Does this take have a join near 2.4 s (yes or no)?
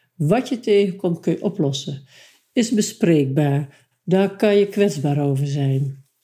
no